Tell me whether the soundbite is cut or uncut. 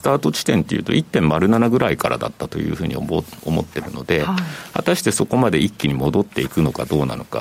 uncut